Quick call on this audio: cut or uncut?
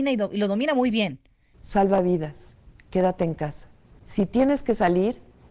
cut